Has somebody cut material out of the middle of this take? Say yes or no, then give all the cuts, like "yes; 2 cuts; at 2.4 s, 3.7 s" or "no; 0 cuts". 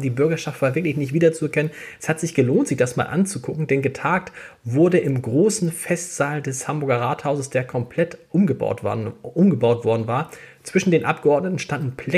no; 0 cuts